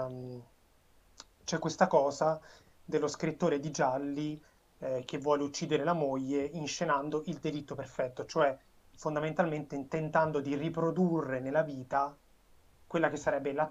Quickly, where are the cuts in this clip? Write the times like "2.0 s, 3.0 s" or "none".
none